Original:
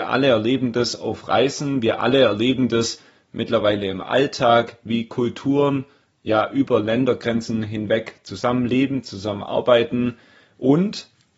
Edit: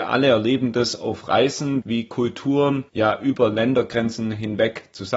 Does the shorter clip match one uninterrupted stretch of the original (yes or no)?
no